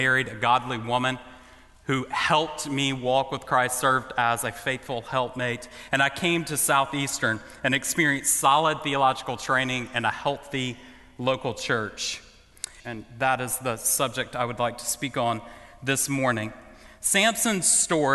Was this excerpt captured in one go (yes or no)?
no